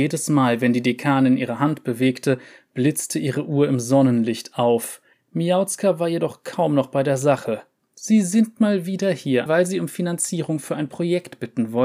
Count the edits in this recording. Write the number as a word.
three